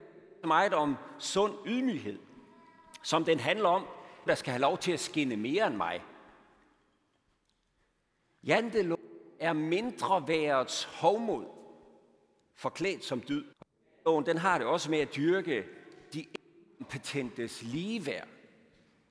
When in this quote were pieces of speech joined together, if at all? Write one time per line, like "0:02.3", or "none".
0:04.3
0:13.5